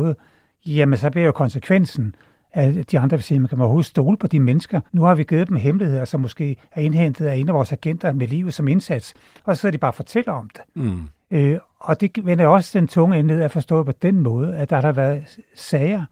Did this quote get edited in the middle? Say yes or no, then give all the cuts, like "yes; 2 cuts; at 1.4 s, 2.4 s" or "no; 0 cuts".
yes; 1 cut; at 4.9 s